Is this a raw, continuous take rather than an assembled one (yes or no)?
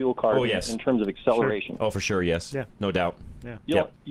yes